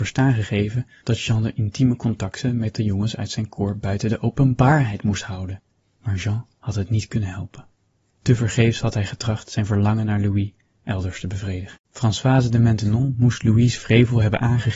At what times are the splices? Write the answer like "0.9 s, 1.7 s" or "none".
11.8 s